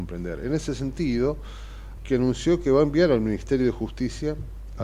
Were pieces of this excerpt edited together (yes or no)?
yes